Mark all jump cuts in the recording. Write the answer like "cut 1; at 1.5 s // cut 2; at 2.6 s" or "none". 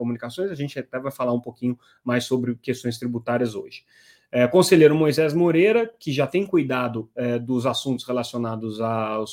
none